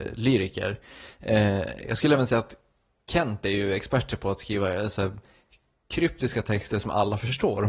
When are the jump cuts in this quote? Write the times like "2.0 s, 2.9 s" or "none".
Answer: none